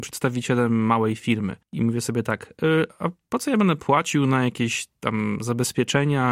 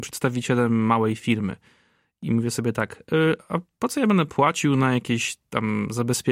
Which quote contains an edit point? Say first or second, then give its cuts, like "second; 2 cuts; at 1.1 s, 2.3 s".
first; 1 cut; at 1.6 s